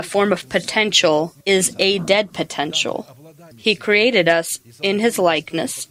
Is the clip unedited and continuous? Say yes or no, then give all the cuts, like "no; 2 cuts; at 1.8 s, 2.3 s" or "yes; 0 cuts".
no; 2 cuts; at 1.4 s, 3.5 s